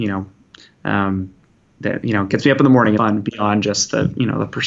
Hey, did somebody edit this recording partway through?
yes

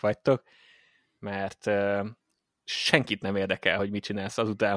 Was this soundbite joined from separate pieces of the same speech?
no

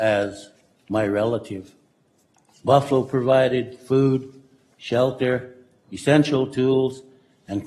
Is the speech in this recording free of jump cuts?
yes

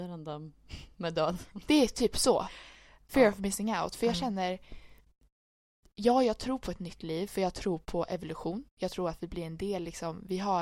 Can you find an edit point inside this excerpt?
no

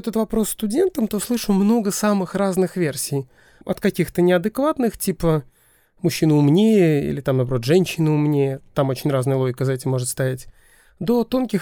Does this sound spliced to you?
no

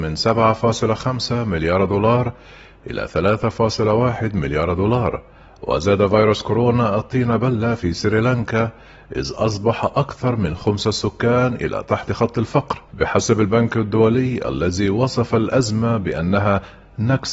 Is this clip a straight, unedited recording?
no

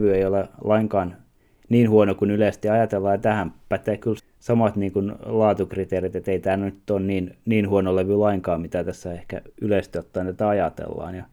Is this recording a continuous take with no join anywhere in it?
no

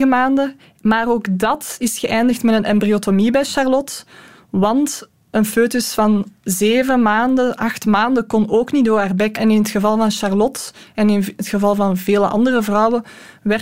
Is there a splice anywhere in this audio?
yes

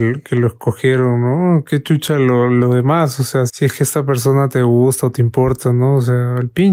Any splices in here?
yes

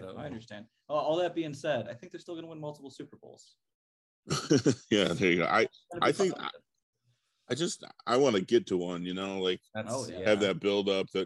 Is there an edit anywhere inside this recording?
yes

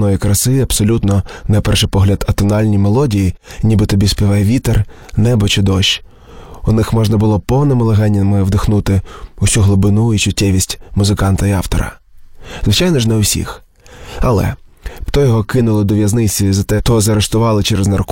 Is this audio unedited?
no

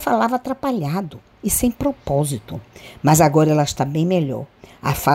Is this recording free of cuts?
yes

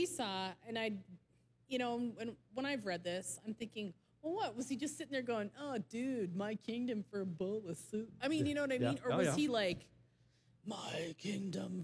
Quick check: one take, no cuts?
yes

